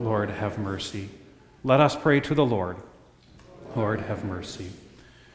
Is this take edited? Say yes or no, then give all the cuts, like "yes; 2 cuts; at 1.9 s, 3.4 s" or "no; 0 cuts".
yes; 1 cut; at 1.5 s